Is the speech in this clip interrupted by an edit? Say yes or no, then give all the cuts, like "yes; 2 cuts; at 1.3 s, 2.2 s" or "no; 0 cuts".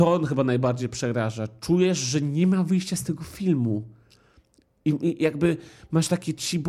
no; 0 cuts